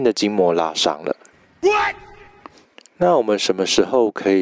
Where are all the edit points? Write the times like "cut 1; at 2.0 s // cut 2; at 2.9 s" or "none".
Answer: none